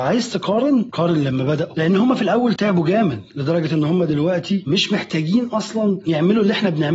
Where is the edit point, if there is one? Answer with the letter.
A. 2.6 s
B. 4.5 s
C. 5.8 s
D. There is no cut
A